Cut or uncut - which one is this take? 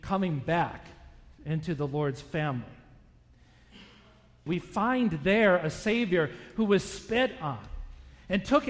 cut